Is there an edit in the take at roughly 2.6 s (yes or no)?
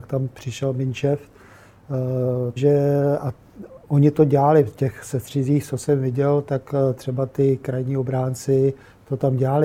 yes